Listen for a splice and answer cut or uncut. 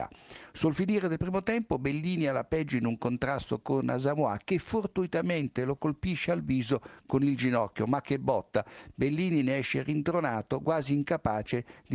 uncut